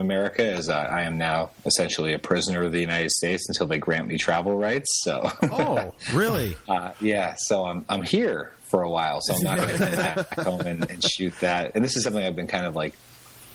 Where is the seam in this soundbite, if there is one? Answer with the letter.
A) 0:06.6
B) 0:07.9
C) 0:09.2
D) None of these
D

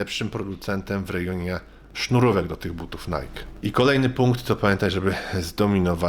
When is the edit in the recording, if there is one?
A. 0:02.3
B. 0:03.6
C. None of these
B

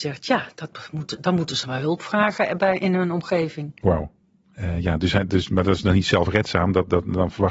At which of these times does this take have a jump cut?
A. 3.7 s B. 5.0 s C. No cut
C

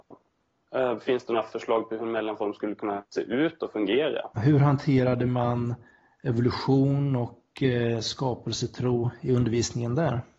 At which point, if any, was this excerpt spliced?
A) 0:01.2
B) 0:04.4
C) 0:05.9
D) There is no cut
B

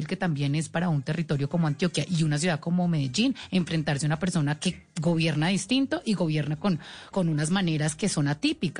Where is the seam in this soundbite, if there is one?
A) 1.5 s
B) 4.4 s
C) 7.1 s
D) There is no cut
C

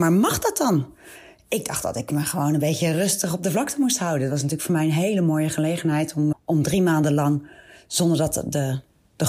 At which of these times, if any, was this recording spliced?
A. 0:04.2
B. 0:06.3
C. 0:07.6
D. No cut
B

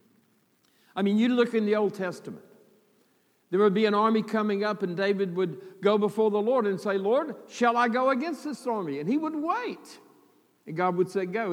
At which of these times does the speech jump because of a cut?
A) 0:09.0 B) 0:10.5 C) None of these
C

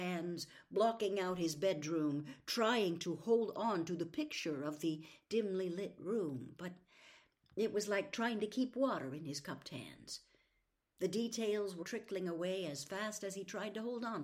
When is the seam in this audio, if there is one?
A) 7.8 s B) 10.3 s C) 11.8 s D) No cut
C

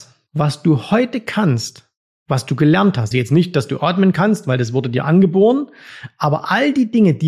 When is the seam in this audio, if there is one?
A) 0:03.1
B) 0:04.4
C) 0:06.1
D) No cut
A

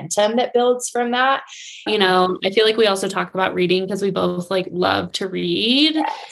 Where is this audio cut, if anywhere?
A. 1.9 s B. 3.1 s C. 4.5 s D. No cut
A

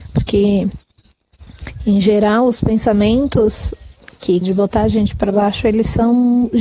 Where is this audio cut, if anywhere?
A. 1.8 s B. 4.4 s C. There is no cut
B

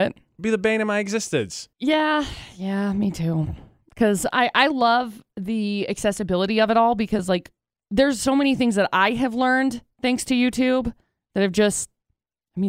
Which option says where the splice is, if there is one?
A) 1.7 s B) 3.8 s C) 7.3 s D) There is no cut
A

